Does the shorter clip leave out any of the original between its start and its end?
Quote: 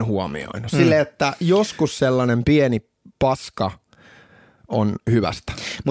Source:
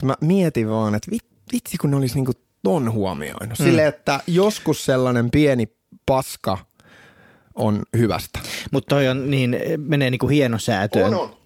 no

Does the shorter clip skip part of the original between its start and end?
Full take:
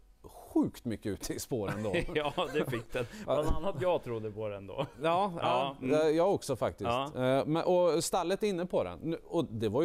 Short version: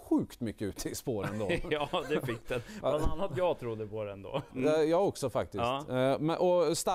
yes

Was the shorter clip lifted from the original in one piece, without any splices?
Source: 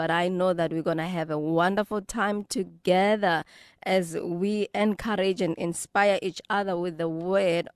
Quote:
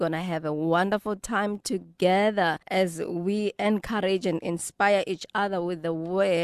no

